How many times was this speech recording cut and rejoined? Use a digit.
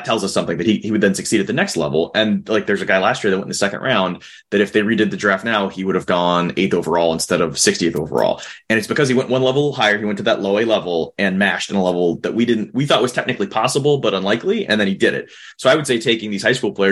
0